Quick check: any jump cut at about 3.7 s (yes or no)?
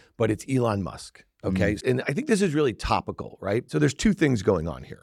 yes